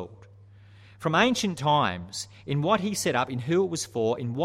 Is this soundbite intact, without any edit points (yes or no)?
yes